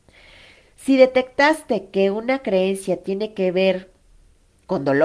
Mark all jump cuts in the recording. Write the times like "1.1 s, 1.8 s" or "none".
none

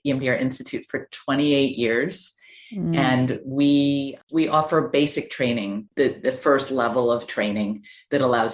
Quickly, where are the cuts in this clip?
none

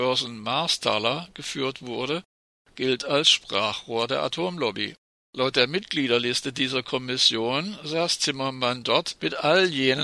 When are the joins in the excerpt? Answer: 5.2 s

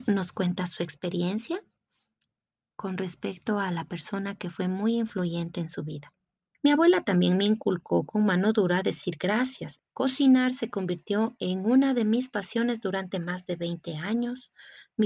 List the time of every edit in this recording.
6.5 s, 9.8 s

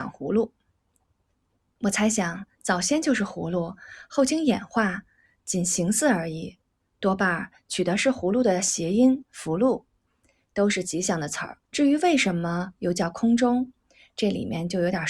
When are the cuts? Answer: 10.5 s, 11.6 s

